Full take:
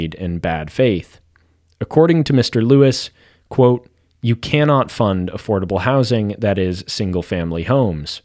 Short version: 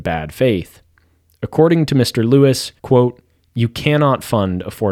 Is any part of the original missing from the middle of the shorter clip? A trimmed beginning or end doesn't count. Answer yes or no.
yes